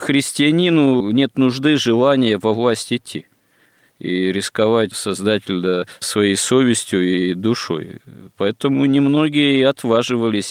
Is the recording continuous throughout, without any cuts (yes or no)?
no